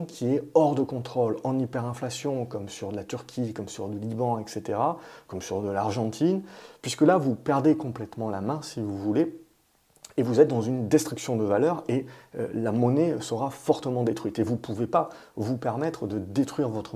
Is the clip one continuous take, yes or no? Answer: yes